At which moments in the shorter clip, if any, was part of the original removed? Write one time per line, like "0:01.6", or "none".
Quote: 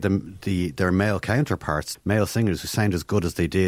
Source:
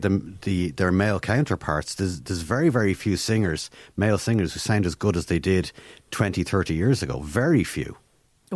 0:01.9

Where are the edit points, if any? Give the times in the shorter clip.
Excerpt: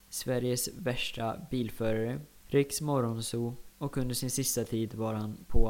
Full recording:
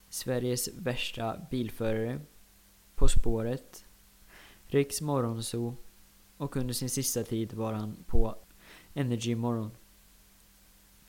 0:02.4
0:03.7

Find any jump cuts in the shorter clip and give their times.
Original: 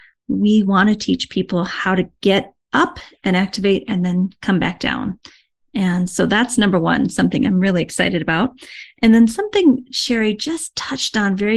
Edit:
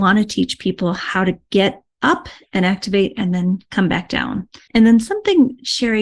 0:04.7

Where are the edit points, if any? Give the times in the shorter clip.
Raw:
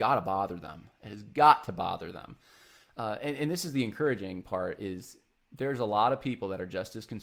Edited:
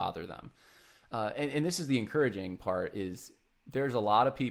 none

